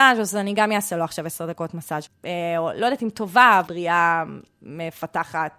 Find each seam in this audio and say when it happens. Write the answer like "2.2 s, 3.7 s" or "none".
2.1 s, 3.7 s